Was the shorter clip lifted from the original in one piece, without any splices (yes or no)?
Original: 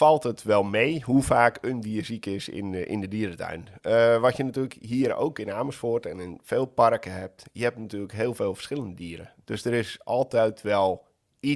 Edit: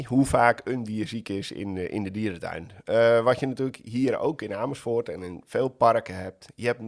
yes